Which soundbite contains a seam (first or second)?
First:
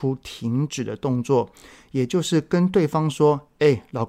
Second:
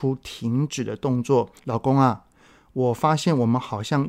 second